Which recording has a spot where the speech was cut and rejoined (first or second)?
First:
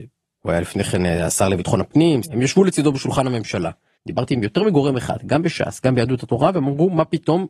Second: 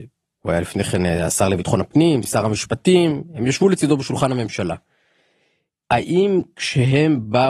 first